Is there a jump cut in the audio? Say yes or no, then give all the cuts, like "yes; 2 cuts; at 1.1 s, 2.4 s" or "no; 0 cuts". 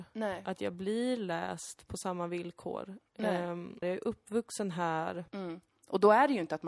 yes; 2 cuts; at 3.8 s, 5.7 s